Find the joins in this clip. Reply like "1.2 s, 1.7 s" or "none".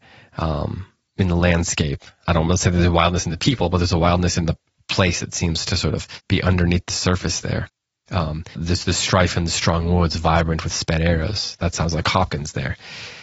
8.5 s